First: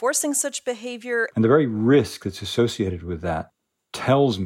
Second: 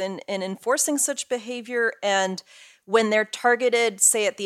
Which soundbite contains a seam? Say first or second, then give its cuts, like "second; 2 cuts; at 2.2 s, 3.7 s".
first; 1 cut; at 1.3 s